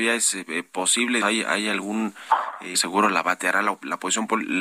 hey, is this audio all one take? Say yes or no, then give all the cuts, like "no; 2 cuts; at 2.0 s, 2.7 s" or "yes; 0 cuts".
no; 2 cuts; at 1.2 s, 2.7 s